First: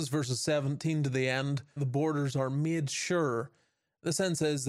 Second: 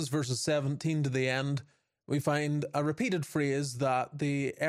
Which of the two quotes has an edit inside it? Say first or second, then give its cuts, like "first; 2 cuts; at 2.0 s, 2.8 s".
first; 1 cut; at 1.8 s